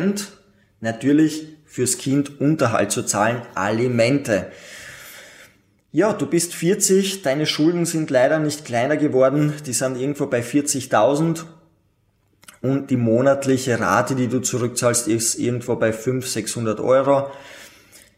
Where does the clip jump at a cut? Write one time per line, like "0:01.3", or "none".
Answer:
none

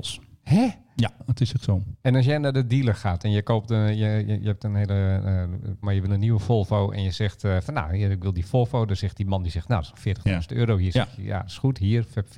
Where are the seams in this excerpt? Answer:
0:05.8

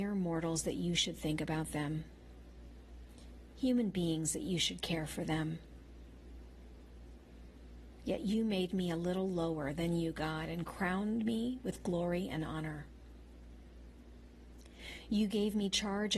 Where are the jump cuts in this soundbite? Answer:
none

